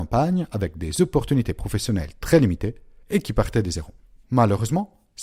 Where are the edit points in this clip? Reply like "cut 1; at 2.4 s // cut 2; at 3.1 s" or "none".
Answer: cut 1; at 4.2 s